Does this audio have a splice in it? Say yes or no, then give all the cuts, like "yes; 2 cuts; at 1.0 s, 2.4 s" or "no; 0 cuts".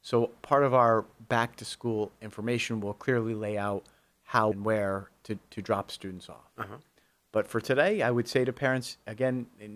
yes; 1 cut; at 4.5 s